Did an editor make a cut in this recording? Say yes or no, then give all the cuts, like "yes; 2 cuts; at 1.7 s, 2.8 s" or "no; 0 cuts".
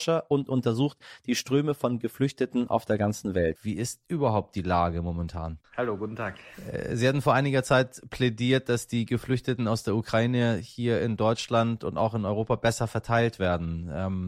yes; 2 cuts; at 3.6 s, 5.6 s